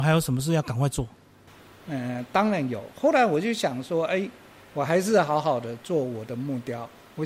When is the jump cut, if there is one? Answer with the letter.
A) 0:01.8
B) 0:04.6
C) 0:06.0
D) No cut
A